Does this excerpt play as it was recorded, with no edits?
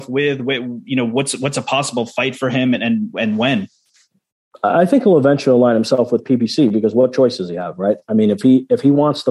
yes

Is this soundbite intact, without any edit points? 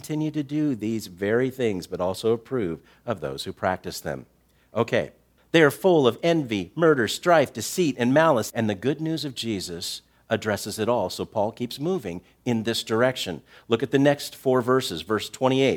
no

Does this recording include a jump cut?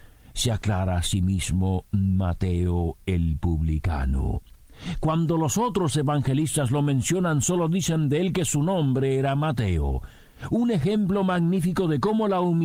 no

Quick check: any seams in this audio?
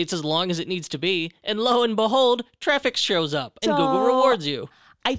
yes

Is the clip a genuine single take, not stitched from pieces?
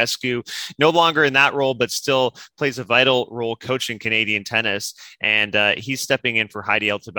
yes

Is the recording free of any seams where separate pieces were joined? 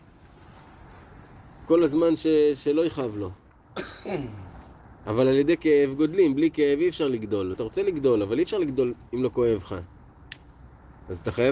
no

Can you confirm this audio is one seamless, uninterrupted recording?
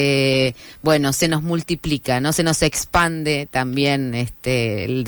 yes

